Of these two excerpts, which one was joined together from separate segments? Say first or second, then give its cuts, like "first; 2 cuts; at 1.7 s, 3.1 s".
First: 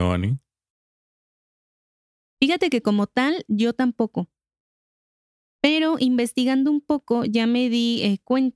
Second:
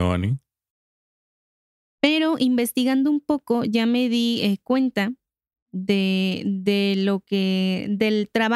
second; 1 cut; at 1.9 s